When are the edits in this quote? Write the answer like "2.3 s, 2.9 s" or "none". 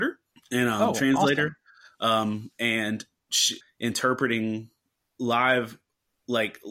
3.6 s